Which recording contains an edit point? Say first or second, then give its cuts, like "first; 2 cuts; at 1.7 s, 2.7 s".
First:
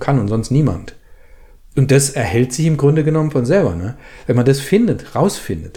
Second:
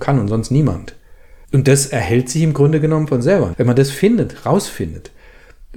second; 2 cuts; at 1.4 s, 3.5 s